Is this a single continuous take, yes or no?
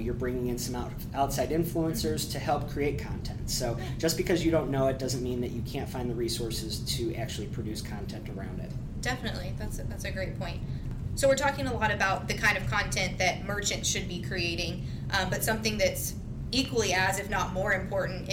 yes